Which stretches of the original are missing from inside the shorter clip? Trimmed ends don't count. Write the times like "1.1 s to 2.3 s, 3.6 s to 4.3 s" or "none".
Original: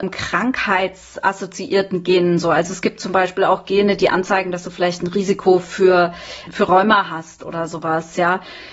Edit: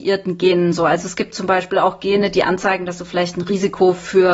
none

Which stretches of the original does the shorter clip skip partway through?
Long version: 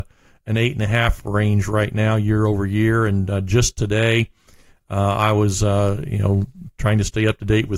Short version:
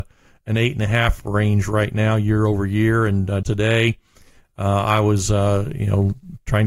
3.4 s to 3.7 s

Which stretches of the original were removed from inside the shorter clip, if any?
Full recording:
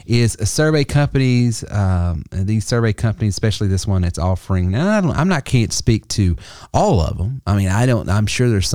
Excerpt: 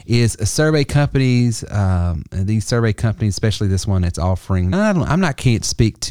4.7 s to 4.8 s

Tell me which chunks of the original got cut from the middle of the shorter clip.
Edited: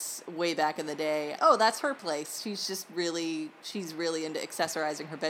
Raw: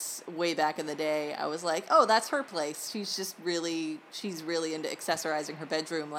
1.4 s to 1.9 s

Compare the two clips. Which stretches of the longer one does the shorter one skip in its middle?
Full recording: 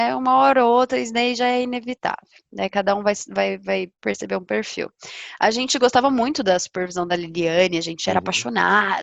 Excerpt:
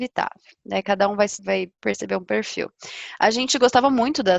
3.3 s to 3.6 s

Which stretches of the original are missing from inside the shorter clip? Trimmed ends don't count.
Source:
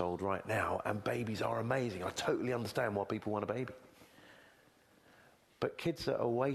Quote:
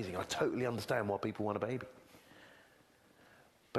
none

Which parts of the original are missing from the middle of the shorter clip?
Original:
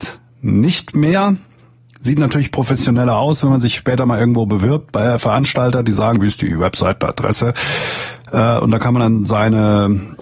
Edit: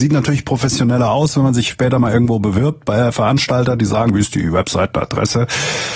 none

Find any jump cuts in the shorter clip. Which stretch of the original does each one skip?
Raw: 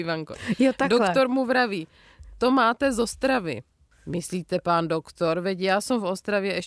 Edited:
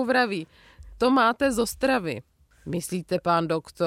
none

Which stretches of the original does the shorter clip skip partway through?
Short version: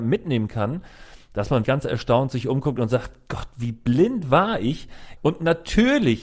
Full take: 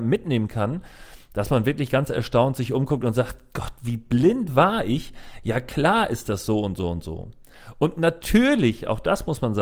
1.6 s to 1.9 s, 5.4 s to 7.7 s

